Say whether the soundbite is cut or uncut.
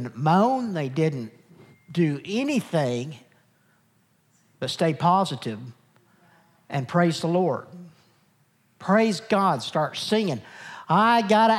uncut